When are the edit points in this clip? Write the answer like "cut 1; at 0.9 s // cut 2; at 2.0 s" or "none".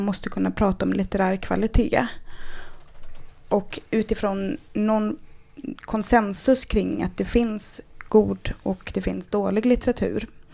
none